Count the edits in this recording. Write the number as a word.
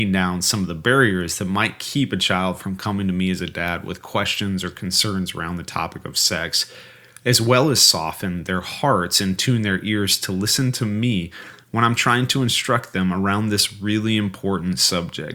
zero